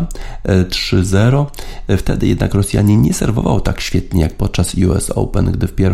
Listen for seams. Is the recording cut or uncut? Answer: uncut